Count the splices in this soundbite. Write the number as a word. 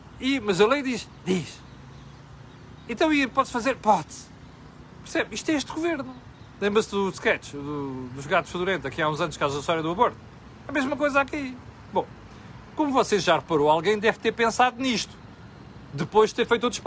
zero